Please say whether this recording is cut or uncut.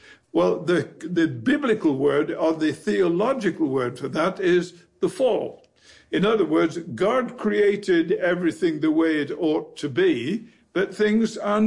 uncut